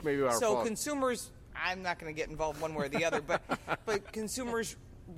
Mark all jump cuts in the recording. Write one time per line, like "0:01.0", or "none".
0:01.5